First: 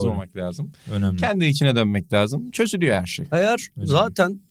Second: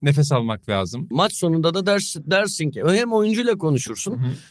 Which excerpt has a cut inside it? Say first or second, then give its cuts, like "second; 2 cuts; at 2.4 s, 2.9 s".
second; 1 cut; at 1.1 s